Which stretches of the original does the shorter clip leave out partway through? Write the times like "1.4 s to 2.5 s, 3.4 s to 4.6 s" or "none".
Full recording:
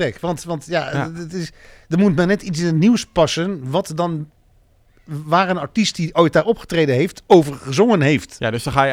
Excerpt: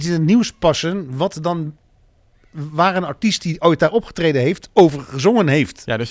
none